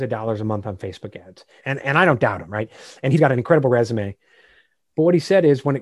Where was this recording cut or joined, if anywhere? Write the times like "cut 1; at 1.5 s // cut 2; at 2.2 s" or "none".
cut 1; at 1.6 s